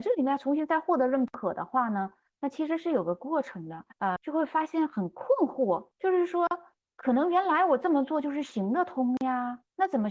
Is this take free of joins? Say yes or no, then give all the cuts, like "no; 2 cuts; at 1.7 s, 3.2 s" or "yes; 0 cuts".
no; 1 cut; at 4.2 s